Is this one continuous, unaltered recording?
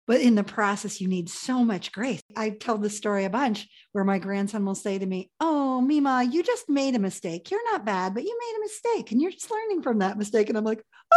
yes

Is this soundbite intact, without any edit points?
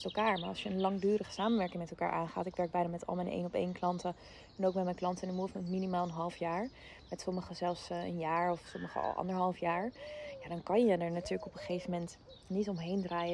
yes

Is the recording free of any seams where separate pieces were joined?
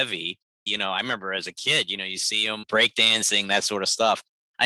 yes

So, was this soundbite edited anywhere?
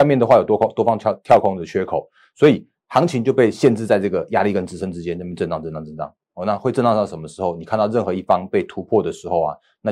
no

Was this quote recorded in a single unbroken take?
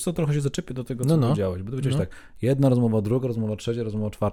yes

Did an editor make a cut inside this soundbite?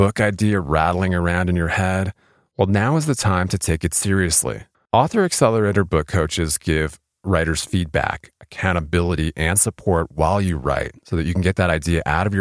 yes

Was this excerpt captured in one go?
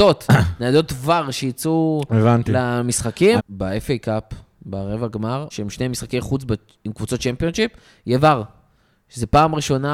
no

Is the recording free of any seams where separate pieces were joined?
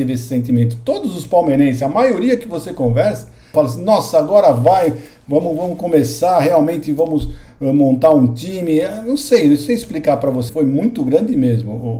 no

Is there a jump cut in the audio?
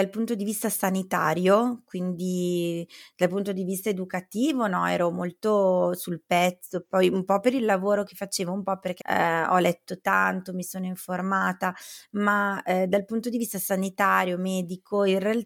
yes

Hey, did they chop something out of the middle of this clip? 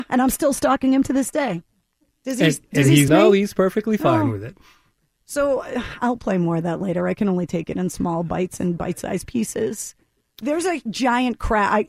yes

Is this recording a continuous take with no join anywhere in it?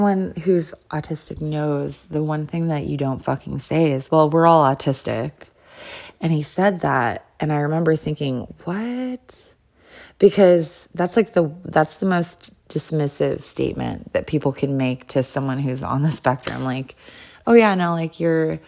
yes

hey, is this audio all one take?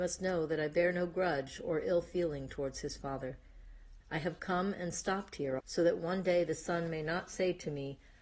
no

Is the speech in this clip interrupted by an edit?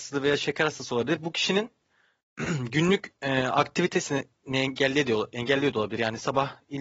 no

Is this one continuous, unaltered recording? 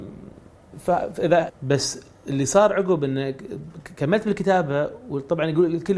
no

